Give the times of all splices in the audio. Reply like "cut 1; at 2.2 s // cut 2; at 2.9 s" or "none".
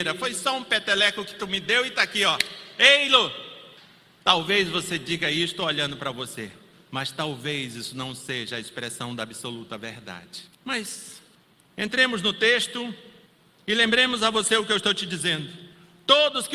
cut 1; at 10.5 s